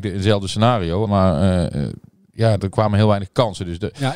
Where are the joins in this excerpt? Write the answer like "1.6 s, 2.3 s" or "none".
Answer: 1.1 s, 2.6 s